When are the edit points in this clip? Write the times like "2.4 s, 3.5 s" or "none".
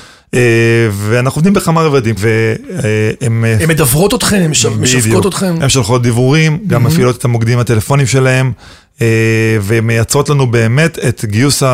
2.2 s